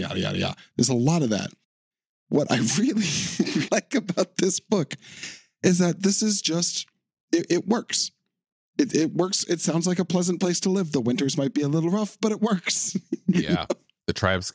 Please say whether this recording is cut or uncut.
cut